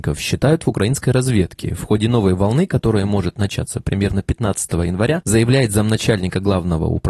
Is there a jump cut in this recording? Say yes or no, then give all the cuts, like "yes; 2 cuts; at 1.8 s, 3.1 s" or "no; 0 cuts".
yes; 1 cut; at 5.2 s